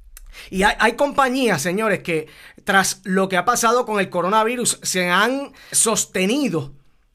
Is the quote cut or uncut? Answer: cut